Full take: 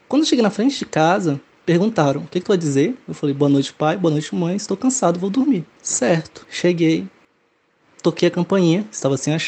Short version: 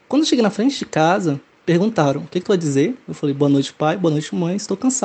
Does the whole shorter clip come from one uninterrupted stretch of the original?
yes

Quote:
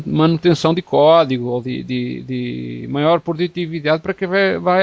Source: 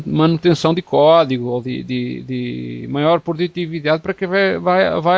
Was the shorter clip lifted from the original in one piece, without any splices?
yes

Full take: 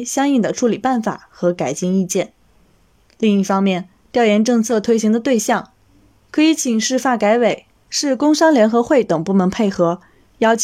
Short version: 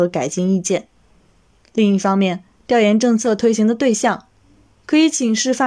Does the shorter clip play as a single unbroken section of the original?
yes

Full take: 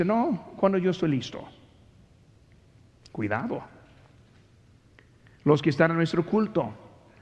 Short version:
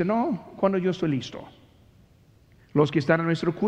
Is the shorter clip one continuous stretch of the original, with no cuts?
no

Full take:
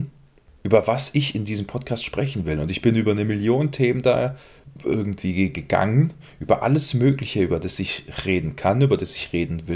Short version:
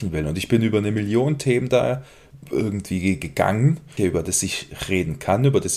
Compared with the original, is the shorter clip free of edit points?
no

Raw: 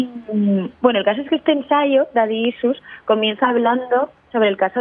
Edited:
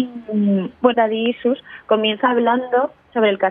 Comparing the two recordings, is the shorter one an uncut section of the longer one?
no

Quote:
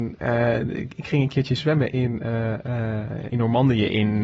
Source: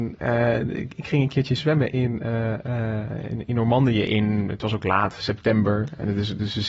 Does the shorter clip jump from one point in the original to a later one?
yes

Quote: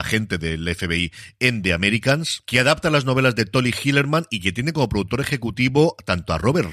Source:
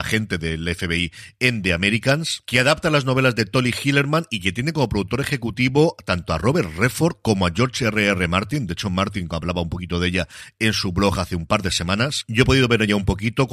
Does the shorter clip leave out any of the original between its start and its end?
no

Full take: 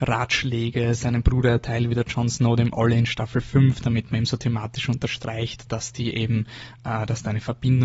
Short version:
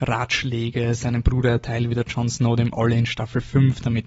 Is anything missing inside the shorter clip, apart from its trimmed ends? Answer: no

